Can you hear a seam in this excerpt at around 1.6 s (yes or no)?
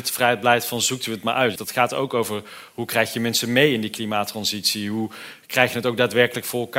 yes